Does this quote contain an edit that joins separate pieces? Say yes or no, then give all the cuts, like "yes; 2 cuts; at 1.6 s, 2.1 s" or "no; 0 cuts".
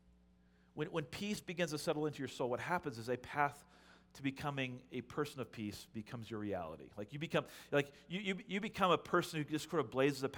no; 0 cuts